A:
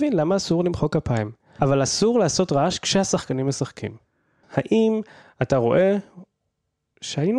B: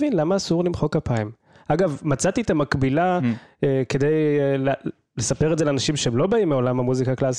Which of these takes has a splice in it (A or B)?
A